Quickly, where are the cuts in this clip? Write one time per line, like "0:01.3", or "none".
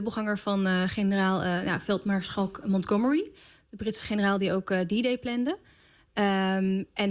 none